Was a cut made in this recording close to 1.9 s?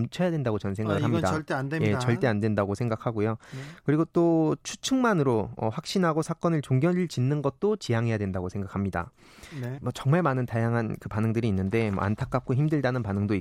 no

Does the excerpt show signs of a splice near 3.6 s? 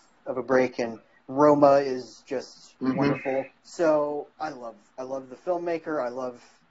yes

